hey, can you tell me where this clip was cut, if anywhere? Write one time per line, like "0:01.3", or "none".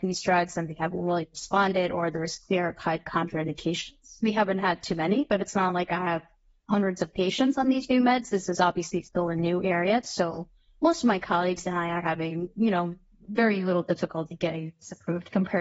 none